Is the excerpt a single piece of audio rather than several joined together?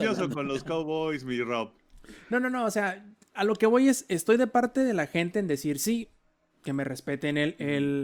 yes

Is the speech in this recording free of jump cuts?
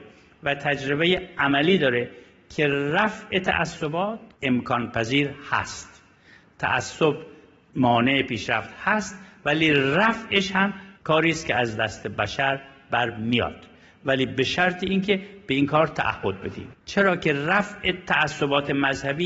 no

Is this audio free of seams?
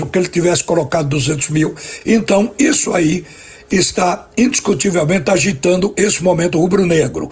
yes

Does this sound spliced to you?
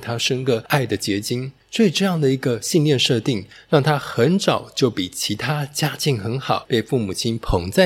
yes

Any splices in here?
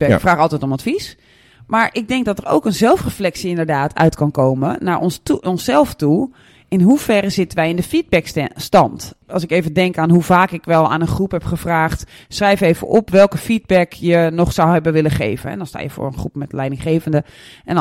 no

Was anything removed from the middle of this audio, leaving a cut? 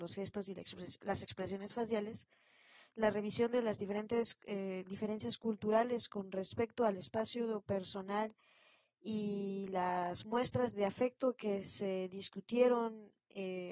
no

